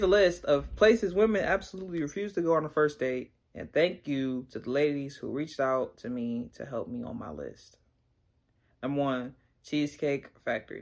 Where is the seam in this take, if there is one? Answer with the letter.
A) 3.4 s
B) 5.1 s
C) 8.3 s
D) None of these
A